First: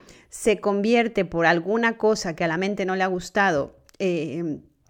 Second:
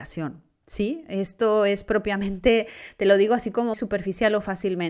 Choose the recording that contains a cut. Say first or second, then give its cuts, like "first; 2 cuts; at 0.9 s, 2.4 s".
second; 1 cut; at 3.7 s